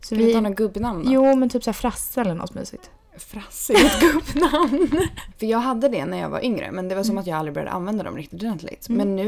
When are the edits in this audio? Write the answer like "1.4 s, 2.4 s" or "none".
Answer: 5.3 s

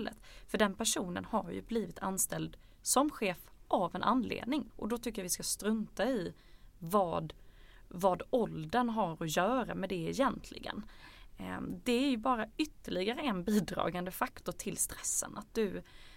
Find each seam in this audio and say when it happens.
4.7 s

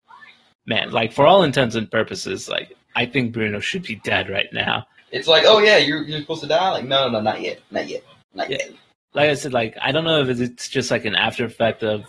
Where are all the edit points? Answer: 5.0 s

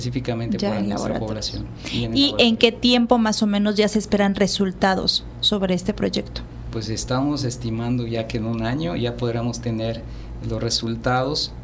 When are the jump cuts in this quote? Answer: none

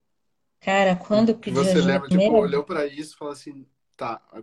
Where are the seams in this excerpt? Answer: 2.1 s

